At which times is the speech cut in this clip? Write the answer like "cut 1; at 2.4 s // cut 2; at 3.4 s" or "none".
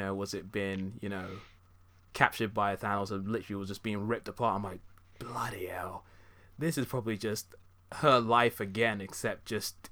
none